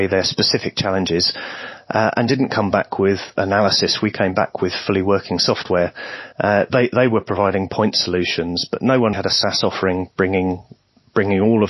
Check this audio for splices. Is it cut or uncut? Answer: cut